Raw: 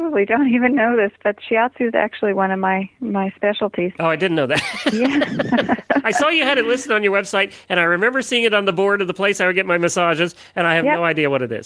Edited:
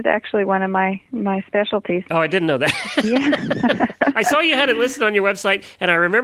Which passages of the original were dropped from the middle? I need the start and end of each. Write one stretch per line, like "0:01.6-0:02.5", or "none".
none